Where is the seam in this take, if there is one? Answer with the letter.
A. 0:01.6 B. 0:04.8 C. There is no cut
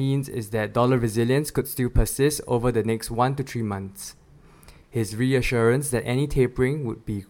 B